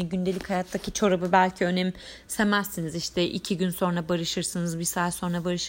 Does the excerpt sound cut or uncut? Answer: uncut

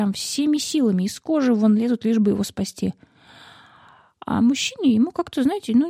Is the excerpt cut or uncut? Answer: uncut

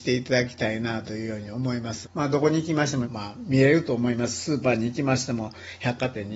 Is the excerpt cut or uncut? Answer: cut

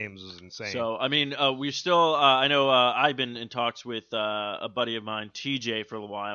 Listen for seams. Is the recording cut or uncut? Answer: uncut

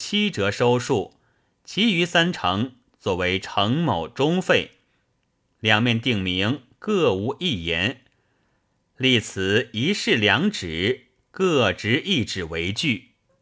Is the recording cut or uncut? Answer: uncut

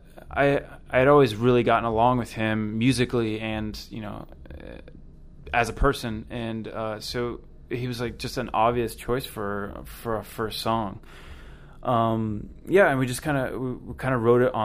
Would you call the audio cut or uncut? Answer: uncut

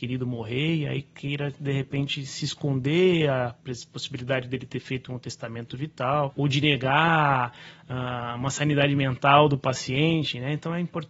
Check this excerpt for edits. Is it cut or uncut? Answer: uncut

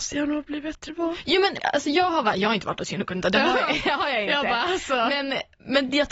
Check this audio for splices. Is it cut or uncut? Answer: cut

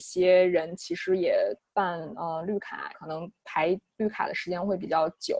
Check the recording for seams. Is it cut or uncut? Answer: cut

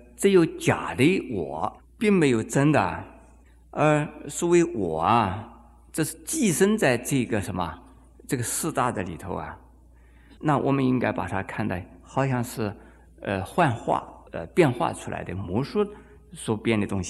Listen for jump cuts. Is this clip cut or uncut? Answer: cut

